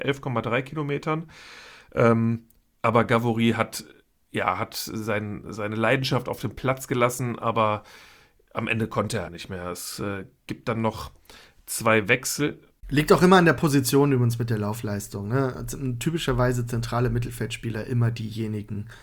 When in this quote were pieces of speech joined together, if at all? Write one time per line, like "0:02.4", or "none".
0:09.3